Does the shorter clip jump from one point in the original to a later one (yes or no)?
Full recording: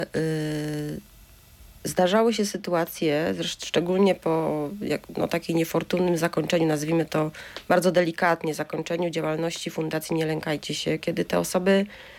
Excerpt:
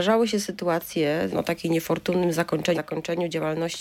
yes